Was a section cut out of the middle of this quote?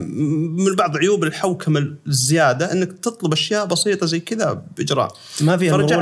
no; 0 cuts

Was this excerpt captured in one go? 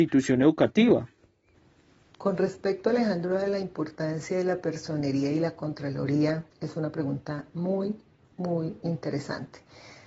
no; 1 cut; at 6.5 s

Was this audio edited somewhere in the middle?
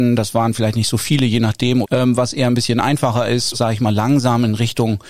yes; 2 cuts; at 1.8 s, 3.5 s

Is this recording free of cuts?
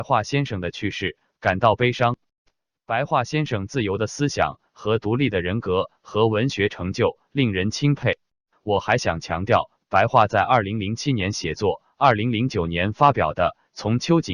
no; 1 cut; at 8.5 s

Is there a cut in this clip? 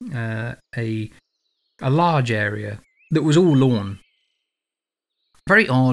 no; 0 cuts

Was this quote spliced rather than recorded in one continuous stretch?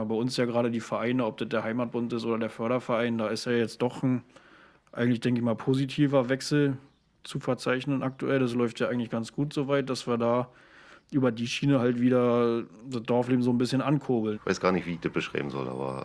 yes; 1 cut; at 14.3 s

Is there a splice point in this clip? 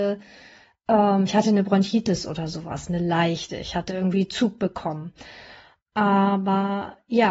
no; 0 cuts

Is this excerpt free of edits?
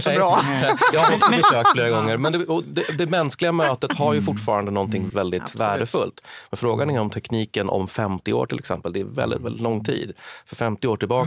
no; 1 cut; at 5.1 s

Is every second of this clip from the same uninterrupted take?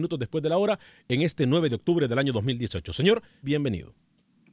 no; 1 cut; at 3.4 s

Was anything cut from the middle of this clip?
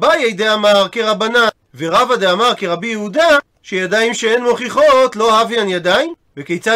yes; 1 cut; at 1.7 s

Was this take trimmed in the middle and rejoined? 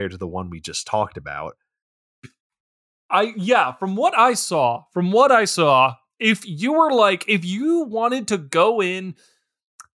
no; 0 cuts

